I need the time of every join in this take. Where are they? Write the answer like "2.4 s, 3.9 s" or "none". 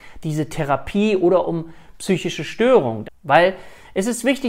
3.0 s